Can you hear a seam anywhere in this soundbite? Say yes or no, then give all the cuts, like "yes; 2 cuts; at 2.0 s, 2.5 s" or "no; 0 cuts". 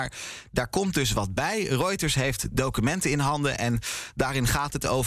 no; 0 cuts